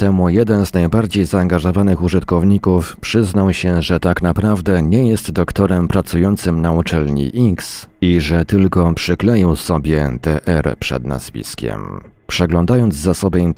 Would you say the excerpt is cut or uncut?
cut